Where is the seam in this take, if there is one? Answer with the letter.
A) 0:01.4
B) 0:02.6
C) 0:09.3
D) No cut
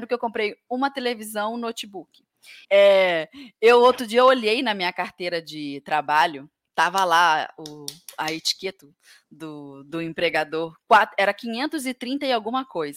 B